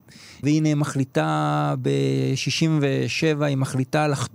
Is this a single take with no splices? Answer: yes; 0 cuts

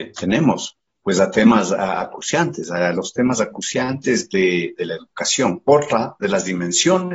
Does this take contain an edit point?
no; 0 cuts

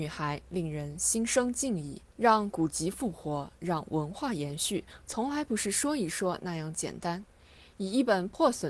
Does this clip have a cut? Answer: yes; 1 cut; at 2.1 s

